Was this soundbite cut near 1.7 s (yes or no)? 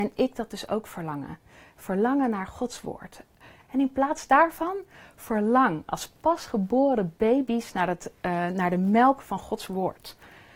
no